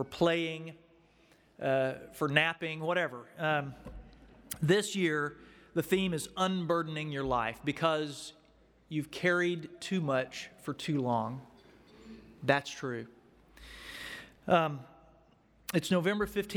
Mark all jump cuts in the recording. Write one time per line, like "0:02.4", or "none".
none